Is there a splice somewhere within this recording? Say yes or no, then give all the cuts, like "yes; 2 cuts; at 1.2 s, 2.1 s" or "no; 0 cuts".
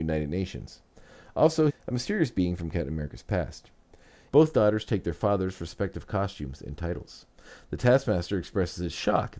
yes; 2 cuts; at 1.7 s, 4.3 s